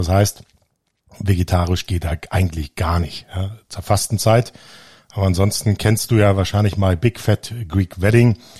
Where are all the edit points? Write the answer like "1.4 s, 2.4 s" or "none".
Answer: none